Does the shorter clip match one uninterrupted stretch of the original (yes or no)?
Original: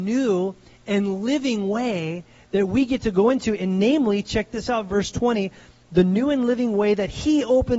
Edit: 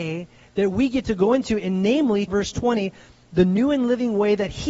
no